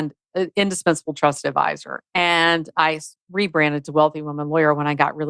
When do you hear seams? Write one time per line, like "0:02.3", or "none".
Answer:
0:02.1